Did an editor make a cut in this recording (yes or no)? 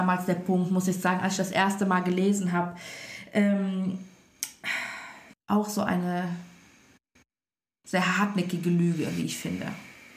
yes